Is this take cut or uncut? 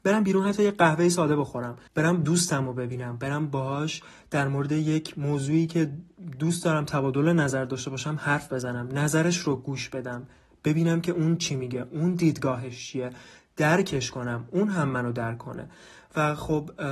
cut